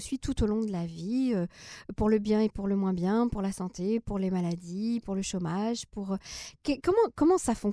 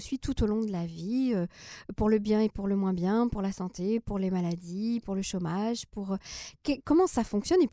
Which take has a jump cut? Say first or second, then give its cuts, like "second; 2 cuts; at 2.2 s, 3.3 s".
second; 1 cut; at 6.8 s